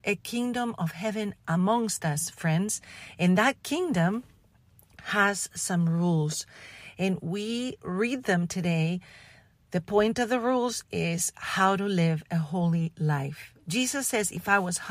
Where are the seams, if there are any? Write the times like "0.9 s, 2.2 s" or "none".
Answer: none

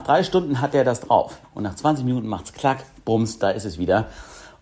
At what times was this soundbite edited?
1.4 s

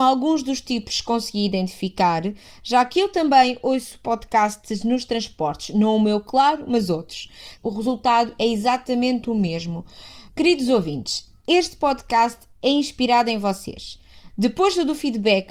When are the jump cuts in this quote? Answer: 7.6 s, 10.3 s

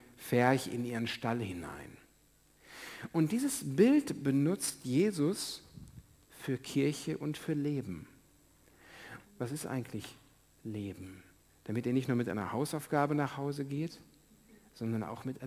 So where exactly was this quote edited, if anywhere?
9.2 s

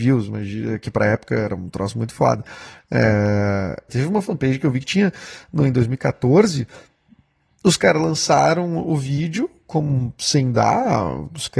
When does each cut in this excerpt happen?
3.9 s

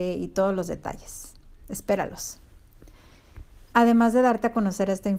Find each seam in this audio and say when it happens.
3.7 s

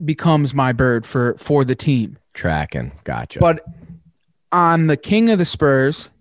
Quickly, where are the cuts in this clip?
none

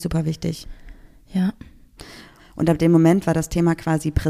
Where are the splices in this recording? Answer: 2.4 s

